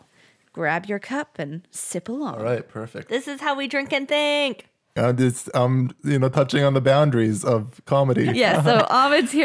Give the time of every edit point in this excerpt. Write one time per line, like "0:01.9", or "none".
0:05.0